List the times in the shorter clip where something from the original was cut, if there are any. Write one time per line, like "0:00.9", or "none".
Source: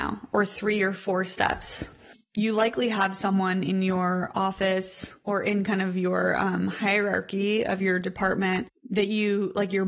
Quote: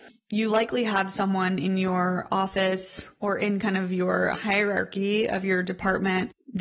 0:04.3